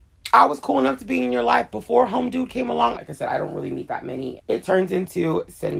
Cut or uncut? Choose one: cut